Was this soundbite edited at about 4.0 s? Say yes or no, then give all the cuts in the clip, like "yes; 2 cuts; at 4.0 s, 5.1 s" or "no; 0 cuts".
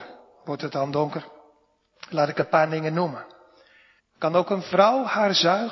yes; 1 cut; at 4.0 s